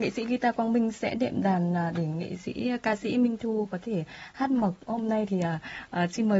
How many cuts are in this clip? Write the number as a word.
zero